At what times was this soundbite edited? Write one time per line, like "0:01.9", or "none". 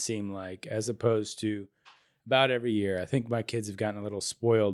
none